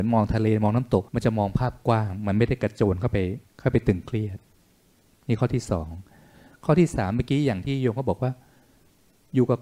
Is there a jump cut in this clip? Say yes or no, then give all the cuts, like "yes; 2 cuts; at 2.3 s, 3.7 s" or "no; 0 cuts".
yes; 2 cuts; at 1.1 s, 3.5 s